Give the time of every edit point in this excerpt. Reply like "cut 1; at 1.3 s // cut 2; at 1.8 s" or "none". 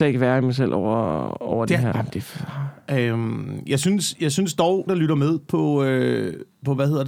cut 1; at 1.9 s // cut 2; at 4.9 s